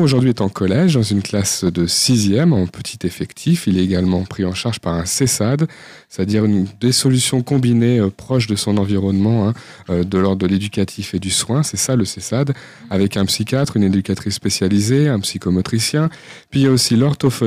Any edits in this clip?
no; 0 cuts

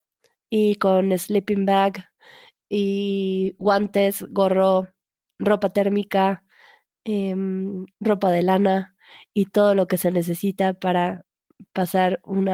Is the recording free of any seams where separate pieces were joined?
yes; 0 cuts

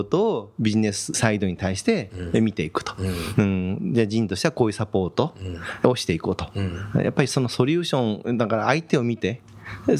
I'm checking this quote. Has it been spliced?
yes; 1 cut; at 3.4 s

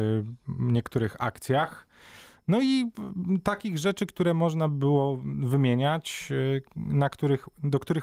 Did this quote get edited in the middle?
no; 0 cuts

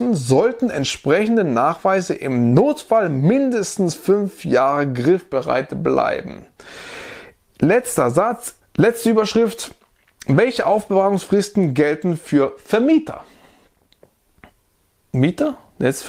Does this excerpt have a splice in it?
yes; 1 cut; at 8.6 s

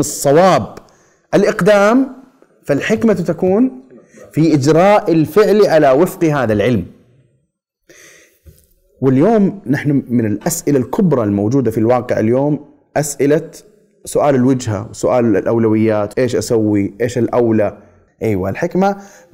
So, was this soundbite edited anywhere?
yes; 2 cuts; at 16.1 s, 18.1 s

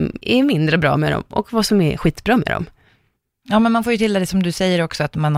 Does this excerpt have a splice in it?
no; 0 cuts

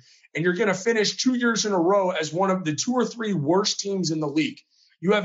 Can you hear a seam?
no; 0 cuts

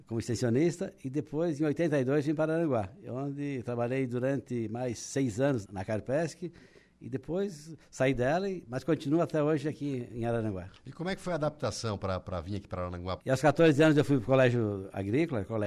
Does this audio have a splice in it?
yes; 2 cuts; at 5.6 s, 13.2 s

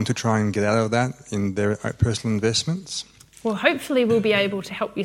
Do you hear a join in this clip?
no; 0 cuts

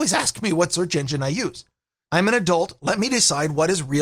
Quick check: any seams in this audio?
yes; 1 cut; at 2.1 s

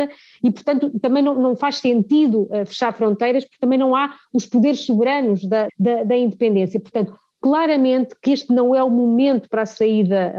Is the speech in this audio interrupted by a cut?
yes; 1 cut; at 5.7 s

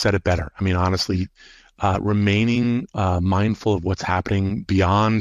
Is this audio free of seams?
yes; 0 cuts

